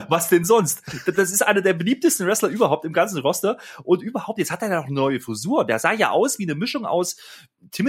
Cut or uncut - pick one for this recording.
uncut